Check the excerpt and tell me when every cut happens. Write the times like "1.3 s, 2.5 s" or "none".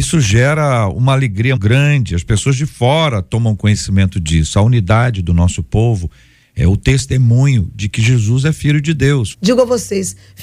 1.6 s, 9.3 s